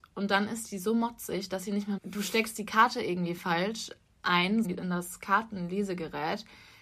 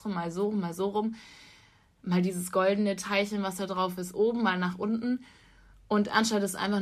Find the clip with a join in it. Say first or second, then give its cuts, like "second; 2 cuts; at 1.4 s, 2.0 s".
first; 2 cuts; at 2.0 s, 4.6 s